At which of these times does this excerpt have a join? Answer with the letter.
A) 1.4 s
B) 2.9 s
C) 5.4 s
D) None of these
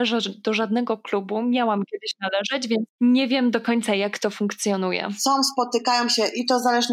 B